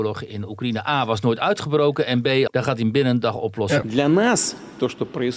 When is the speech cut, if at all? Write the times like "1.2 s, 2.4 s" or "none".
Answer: 2.5 s, 3.8 s